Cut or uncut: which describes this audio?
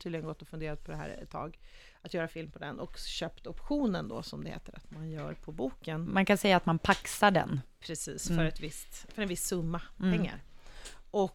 uncut